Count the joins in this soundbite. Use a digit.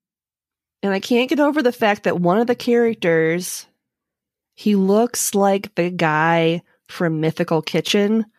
1